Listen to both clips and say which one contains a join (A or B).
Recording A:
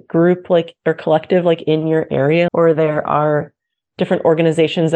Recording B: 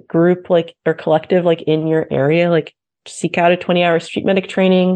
A